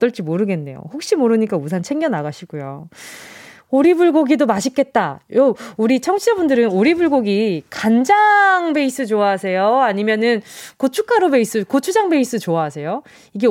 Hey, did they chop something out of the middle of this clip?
no; 0 cuts

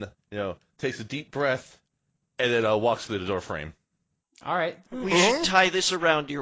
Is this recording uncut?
no; 1 cut; at 4.8 s

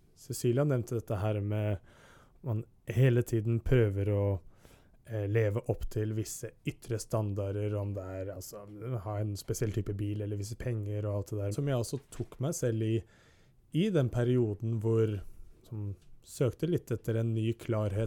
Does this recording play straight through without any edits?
no; 1 cut; at 11.5 s

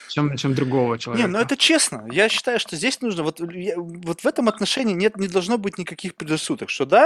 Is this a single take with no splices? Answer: yes; 0 cuts

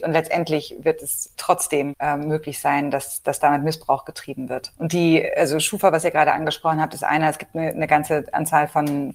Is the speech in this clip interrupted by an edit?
no; 0 cuts

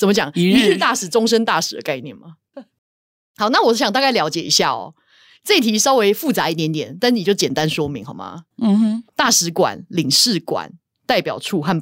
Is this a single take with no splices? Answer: no; 1 cut; at 2.5 s

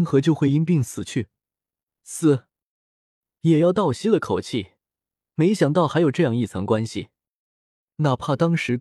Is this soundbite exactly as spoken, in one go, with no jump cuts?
no; 1 cut; at 1.8 s

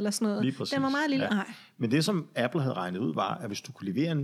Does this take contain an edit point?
yes; 1 cut; at 1.3 s

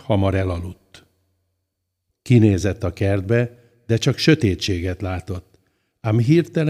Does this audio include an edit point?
yes; 1 cut; at 2.1 s

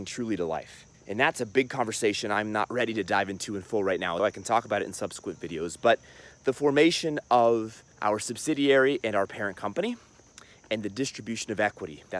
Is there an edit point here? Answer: yes; 3 cuts; at 0.9 s, 4.2 s, 7.9 s

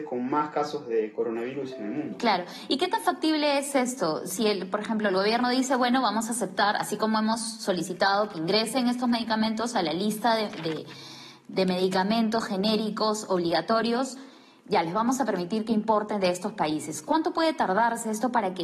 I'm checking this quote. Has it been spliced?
no; 0 cuts

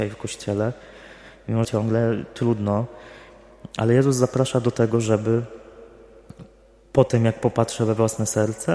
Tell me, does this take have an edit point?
yes; 1 cut; at 1.6 s

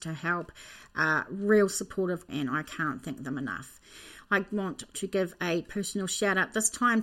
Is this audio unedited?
no; 1 cut; at 2.3 s

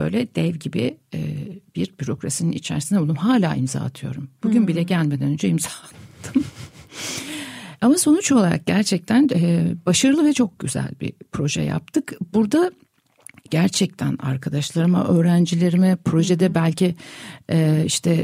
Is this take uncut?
yes; 0 cuts

